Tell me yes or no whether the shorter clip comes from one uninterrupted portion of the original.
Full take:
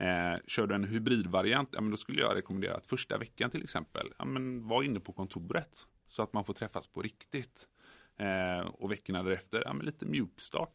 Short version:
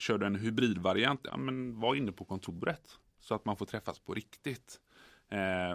no